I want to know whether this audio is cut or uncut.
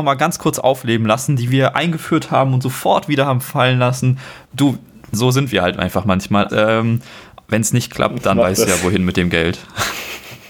cut